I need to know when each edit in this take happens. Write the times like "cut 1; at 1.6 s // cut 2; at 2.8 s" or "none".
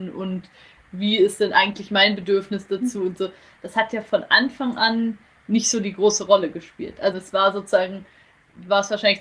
cut 1; at 7.1 s